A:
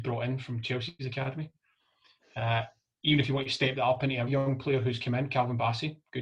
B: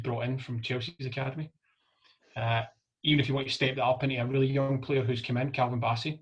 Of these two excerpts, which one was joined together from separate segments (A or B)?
A